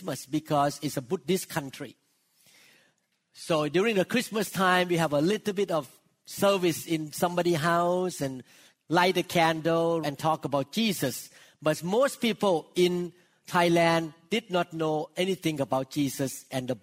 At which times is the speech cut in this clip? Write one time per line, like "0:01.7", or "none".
0:10.0